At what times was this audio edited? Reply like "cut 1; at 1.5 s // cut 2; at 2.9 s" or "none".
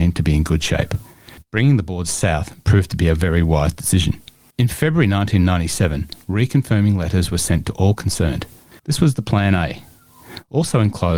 cut 1; at 8.8 s